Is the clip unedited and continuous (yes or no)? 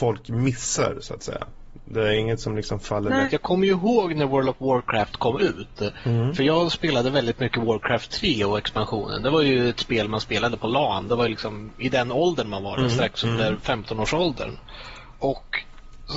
no